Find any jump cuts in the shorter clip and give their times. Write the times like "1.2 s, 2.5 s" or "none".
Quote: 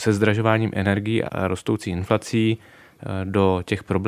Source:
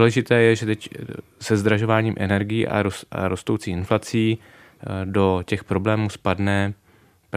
1.3 s